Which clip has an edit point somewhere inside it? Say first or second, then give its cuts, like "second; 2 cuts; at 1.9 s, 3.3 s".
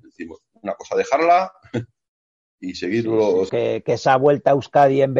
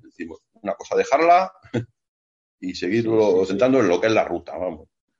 first; 1 cut; at 3.5 s